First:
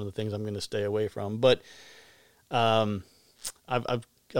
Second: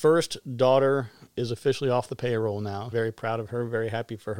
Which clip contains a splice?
second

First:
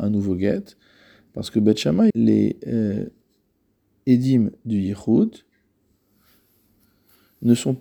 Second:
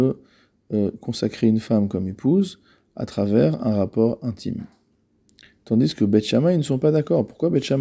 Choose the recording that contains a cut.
first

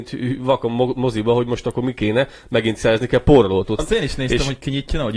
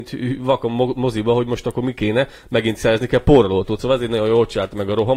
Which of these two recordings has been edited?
first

